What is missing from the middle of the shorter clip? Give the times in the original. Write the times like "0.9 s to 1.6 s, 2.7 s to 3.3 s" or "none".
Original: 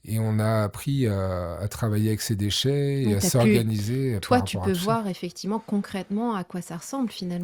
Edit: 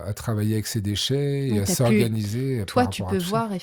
none